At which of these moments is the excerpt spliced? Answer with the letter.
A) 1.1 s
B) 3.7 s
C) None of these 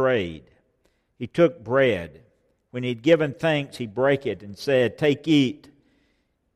C